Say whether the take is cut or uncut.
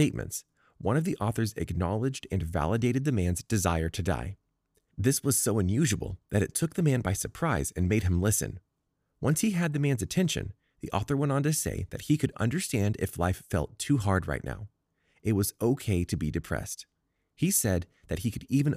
uncut